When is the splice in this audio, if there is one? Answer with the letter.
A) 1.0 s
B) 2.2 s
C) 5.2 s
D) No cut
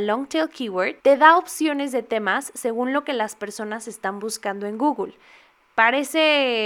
A